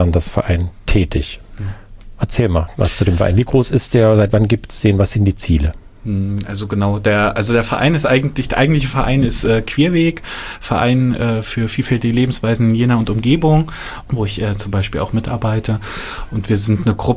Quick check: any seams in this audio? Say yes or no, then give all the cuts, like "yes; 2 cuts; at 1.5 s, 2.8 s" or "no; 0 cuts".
yes; 1 cut; at 14.0 s